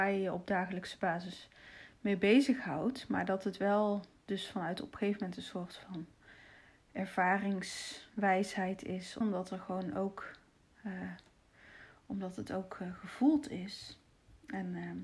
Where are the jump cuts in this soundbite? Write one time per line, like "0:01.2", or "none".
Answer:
0:09.2